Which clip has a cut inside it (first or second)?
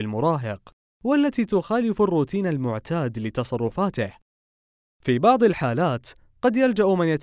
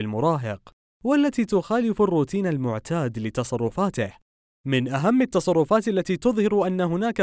second